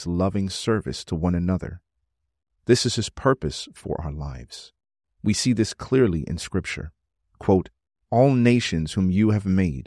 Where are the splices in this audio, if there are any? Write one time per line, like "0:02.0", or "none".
none